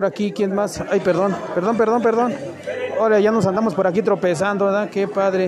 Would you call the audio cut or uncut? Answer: uncut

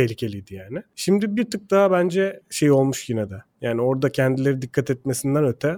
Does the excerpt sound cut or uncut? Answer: uncut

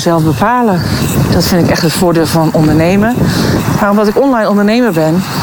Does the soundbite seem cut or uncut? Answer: cut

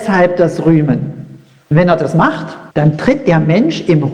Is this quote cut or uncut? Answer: cut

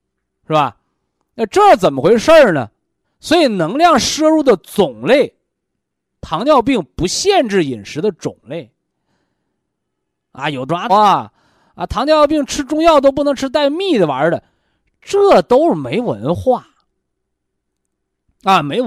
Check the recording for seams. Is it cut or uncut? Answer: cut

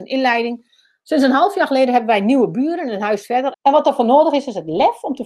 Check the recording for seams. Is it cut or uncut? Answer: cut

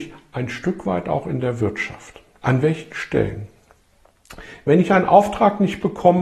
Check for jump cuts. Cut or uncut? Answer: uncut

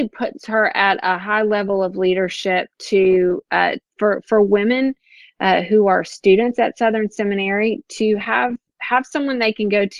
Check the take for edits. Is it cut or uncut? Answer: uncut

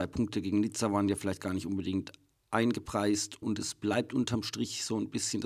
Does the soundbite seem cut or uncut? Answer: cut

